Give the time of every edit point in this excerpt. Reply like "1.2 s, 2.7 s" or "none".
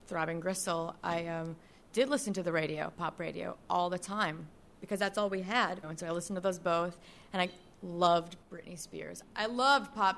5.8 s, 9.2 s